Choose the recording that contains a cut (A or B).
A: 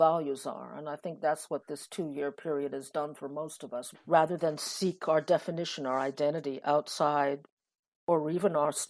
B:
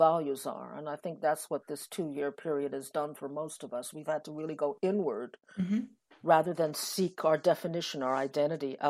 A